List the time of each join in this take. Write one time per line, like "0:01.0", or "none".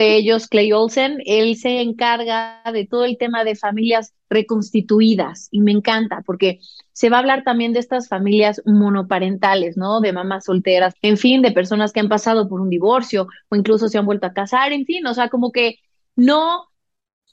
0:11.0